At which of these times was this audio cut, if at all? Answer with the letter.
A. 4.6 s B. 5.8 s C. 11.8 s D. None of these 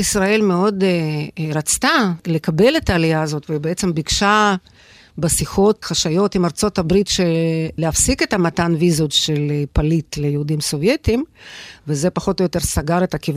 B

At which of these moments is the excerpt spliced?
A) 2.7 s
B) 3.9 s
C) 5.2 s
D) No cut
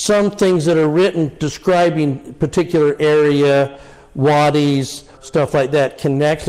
C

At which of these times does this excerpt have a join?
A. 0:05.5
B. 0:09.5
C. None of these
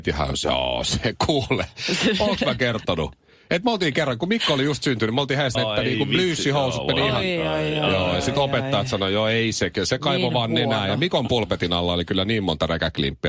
A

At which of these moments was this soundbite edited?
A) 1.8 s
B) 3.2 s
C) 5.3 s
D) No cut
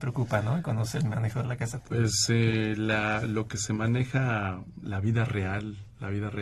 A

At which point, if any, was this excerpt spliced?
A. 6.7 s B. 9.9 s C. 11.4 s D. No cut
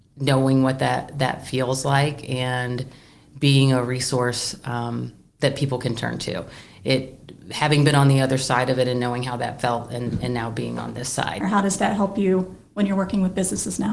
C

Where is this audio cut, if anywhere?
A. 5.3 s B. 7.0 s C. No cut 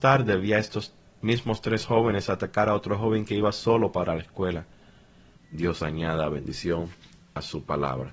A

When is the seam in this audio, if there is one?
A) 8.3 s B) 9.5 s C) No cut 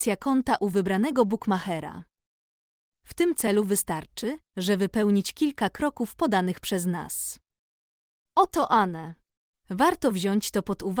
B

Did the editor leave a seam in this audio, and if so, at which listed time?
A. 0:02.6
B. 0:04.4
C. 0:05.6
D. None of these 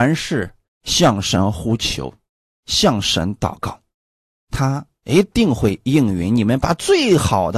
D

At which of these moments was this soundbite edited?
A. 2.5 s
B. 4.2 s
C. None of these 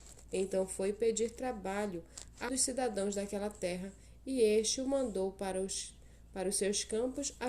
A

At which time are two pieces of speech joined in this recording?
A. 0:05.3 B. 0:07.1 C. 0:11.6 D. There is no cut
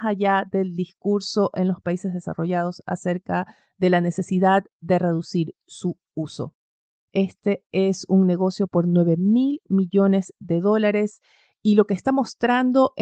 B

